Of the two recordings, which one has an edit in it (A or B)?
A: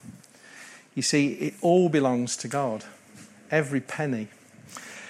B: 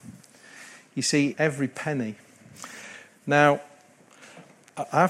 B